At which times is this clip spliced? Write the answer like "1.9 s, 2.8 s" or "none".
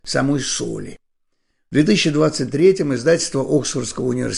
none